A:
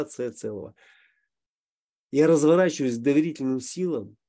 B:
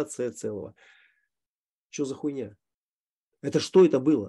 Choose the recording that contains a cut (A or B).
B